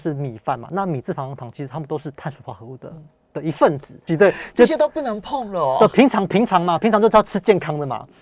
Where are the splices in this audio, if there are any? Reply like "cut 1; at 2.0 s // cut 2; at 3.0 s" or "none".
cut 1; at 4.1 s